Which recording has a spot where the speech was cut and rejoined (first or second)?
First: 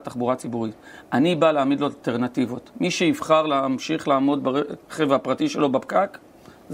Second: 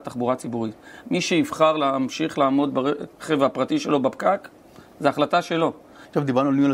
second